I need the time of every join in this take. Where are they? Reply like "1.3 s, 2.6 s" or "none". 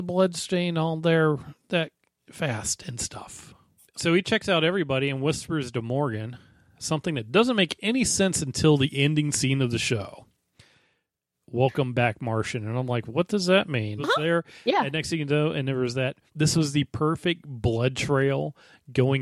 3.8 s, 14.0 s, 16.3 s